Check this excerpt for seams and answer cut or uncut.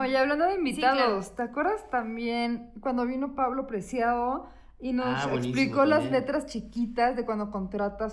uncut